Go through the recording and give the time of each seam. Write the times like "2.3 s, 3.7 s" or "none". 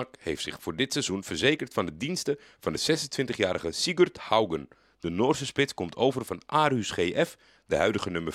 none